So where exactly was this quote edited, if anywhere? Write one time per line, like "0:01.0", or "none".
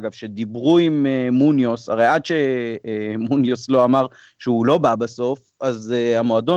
none